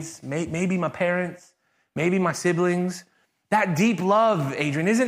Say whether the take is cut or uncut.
uncut